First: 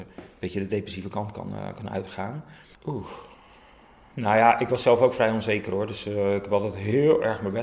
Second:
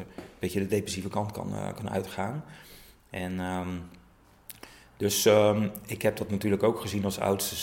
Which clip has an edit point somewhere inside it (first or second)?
first